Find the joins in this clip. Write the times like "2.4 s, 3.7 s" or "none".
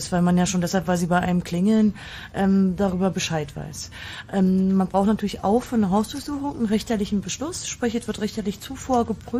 none